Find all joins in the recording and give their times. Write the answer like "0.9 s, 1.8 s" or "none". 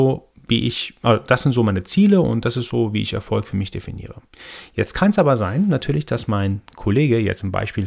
none